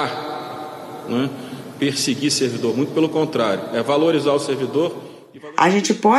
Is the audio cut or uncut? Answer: uncut